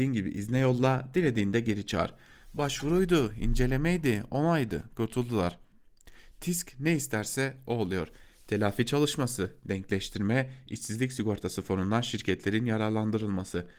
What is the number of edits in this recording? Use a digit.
0